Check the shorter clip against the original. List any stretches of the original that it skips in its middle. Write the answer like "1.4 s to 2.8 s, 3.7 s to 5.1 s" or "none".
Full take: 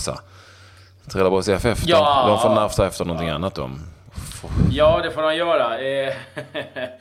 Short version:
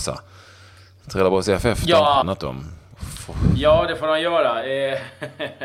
2.2 s to 3.4 s